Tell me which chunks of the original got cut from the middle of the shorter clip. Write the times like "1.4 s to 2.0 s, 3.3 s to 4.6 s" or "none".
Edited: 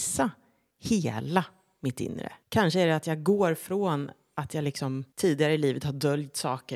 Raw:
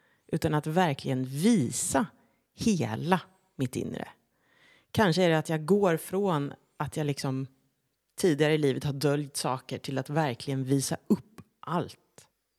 4.2 s to 4.8 s, 7.5 s to 8.1 s